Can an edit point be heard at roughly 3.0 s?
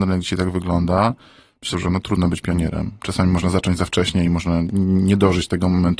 no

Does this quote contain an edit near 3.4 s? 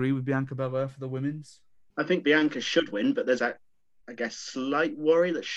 yes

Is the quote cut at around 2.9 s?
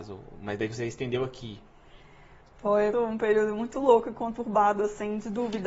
yes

